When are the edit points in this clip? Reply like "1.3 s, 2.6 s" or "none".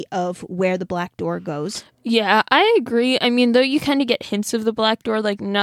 none